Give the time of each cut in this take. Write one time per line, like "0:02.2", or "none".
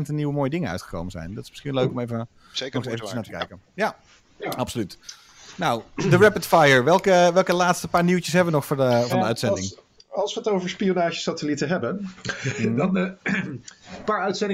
0:09.1